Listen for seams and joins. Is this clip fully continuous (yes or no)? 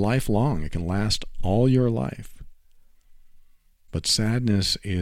yes